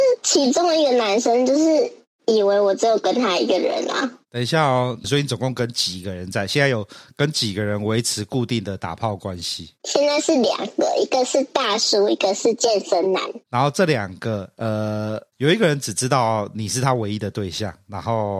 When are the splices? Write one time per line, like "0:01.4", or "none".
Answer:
0:05.0